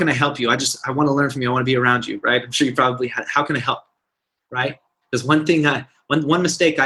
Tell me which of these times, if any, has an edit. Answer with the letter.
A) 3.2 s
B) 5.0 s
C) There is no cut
B